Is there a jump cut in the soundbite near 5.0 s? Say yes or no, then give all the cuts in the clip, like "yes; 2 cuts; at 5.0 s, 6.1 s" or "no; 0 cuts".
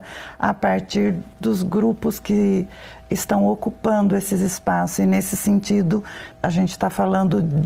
no; 1 cut; at 6.3 s